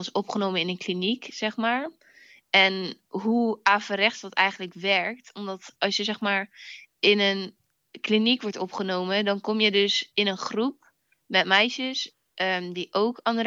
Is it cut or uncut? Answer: uncut